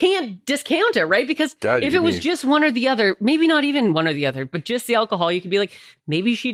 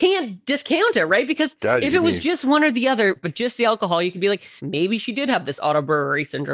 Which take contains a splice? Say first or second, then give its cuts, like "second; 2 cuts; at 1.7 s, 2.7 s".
second; 2 cuts; at 3.2 s, 4.6 s